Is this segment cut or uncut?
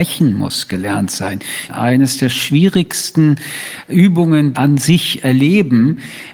cut